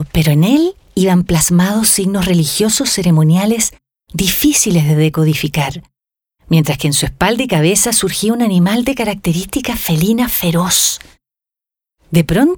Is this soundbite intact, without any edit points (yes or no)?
yes